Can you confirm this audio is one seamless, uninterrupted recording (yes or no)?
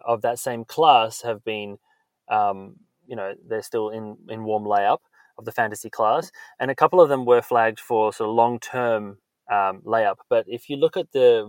yes